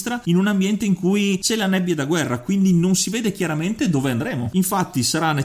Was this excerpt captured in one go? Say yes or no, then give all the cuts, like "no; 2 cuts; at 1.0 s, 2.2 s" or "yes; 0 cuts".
no; 1 cut; at 4.5 s